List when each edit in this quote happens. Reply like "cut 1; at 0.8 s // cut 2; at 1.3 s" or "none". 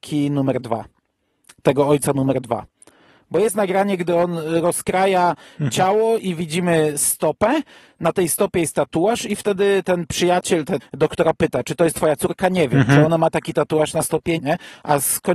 cut 1; at 10.8 s // cut 2; at 14.4 s

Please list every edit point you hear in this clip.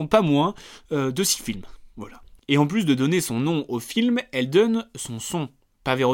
none

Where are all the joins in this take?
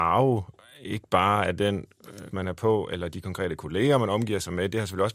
cut 1; at 2.3 s

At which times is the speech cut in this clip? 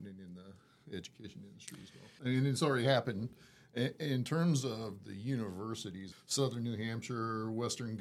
cut 1; at 2.2 s // cut 2; at 6.1 s

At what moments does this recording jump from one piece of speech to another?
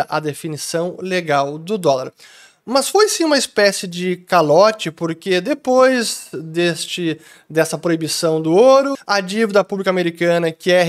cut 1; at 8.9 s

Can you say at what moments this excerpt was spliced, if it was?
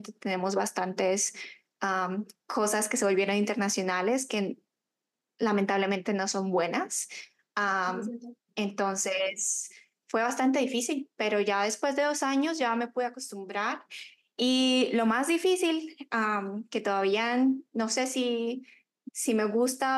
cut 1; at 10.0 s

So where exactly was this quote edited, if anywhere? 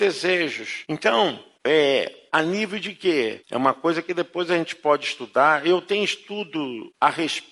cut 1; at 2.3 s // cut 2; at 3.4 s

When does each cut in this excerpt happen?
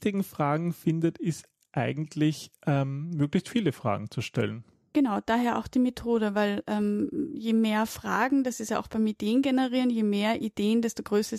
none

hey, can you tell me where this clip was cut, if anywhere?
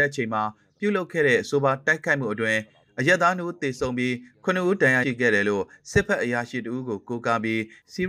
cut 1; at 5.0 s

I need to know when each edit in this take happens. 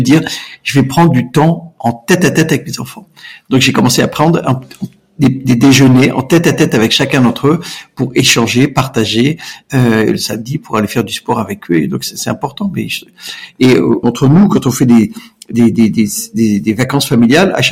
cut 1; at 14.0 s

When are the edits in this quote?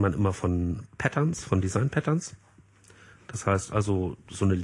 none

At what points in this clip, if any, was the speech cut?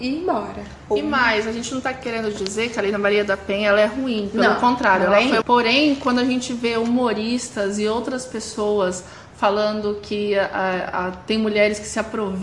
cut 1; at 5.4 s

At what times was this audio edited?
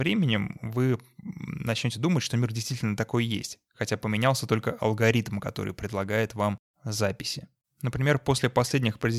cut 1; at 7.6 s

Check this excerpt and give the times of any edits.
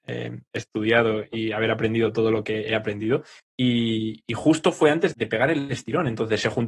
cut 1; at 3.4 s // cut 2; at 5.1 s

